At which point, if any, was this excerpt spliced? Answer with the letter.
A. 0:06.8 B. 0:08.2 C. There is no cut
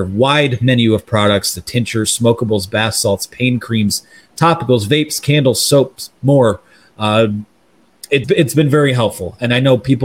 B